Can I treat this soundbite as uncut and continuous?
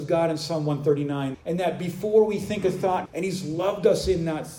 no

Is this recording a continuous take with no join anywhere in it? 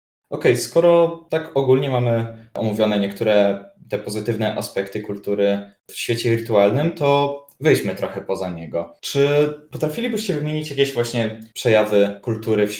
yes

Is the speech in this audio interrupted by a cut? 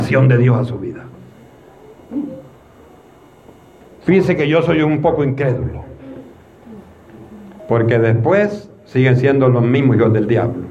yes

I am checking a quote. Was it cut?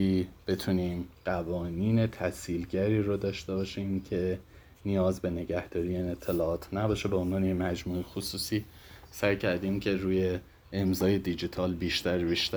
no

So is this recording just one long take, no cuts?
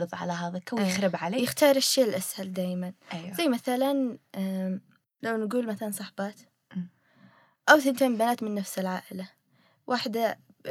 yes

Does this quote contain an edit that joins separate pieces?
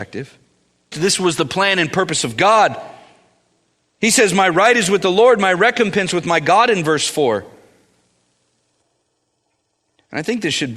yes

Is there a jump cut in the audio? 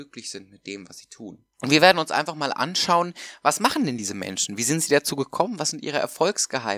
yes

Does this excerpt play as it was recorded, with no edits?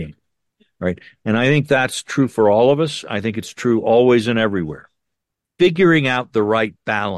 yes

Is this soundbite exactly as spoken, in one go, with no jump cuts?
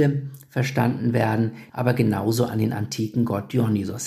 no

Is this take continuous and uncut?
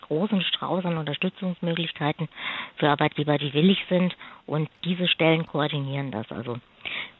yes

